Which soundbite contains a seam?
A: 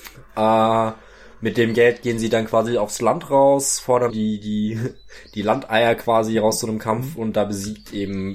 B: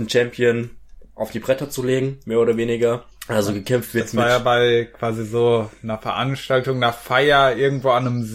A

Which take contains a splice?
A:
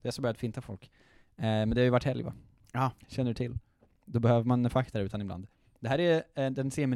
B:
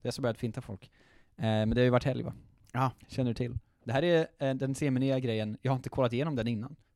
B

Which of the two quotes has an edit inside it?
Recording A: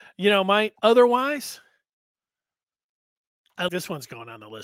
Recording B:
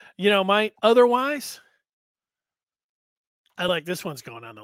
A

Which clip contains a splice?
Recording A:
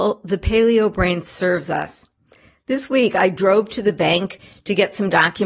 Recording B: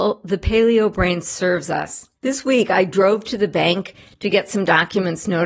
B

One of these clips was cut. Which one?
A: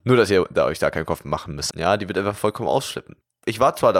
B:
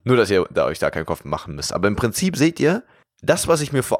A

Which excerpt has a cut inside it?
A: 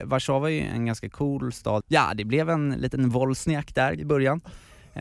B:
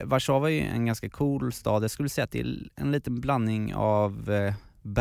A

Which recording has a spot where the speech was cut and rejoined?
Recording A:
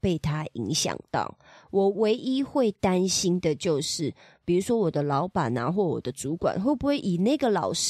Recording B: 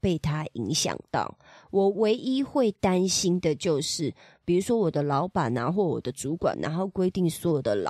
B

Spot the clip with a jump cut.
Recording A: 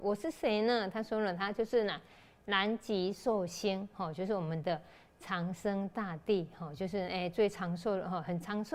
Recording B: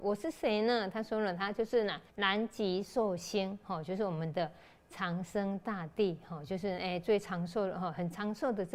B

